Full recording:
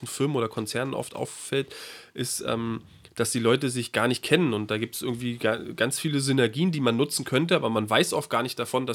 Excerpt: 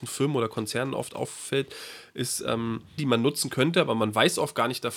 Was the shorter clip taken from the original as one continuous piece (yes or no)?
no